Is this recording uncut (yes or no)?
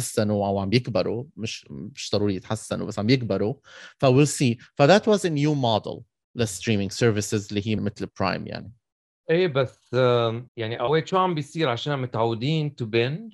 no